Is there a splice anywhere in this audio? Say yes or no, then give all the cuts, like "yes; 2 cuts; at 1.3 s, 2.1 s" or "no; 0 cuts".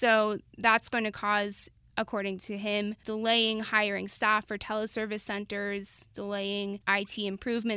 no; 0 cuts